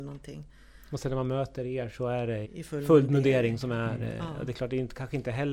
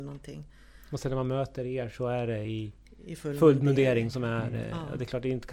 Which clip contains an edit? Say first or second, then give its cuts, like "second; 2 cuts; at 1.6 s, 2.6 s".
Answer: first; 1 cut; at 2.4 s